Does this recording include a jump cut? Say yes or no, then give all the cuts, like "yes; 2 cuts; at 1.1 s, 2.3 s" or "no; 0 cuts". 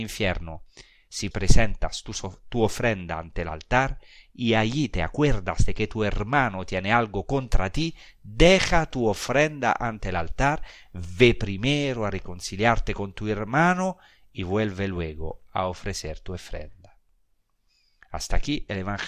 yes; 1 cut; at 1.3 s